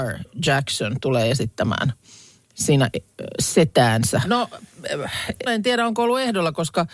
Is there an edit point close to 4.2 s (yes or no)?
yes